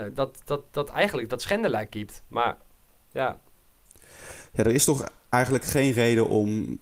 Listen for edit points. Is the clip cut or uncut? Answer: uncut